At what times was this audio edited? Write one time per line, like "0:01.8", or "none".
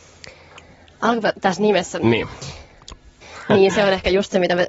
0:03.2